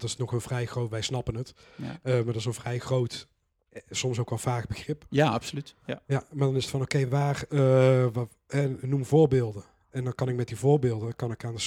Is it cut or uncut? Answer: uncut